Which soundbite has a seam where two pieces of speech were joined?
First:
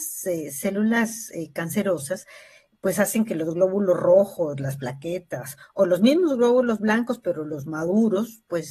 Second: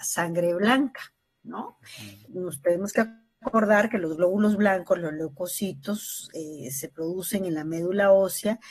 second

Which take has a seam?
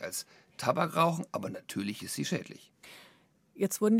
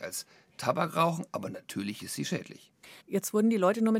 second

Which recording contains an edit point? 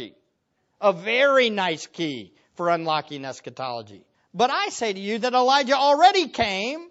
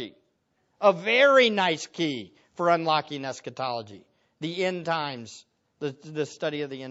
first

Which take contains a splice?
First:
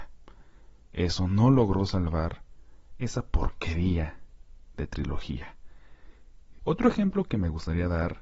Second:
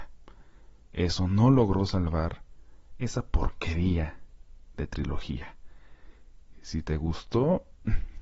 first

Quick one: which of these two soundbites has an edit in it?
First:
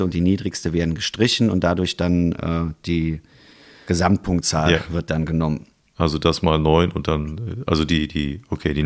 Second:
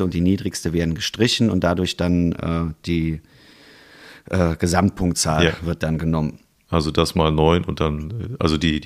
first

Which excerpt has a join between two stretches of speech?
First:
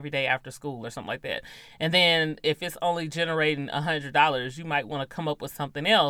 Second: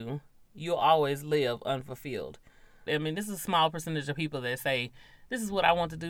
second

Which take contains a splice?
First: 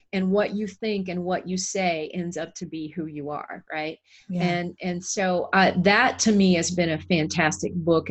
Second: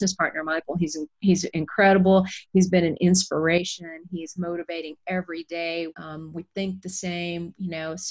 second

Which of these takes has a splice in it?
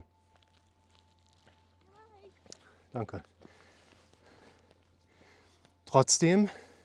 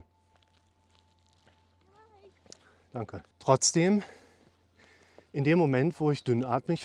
second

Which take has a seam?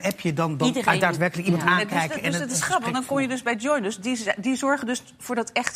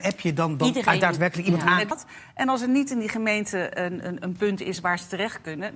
second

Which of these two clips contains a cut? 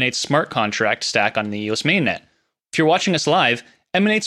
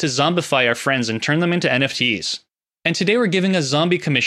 first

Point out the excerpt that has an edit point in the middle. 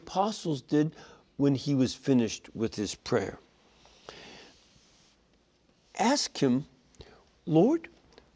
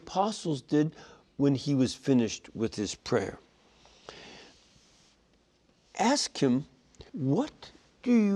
second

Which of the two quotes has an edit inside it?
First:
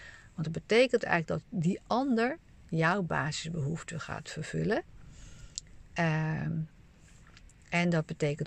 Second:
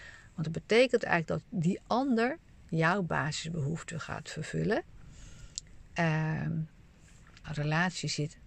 second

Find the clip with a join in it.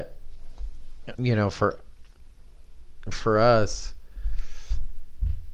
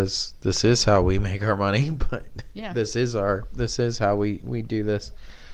first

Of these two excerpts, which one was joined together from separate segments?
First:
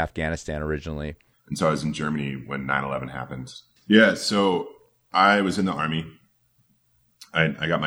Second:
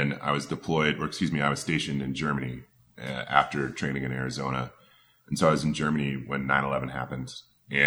first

